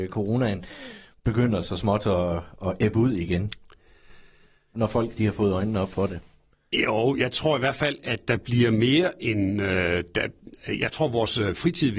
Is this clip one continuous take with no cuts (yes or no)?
yes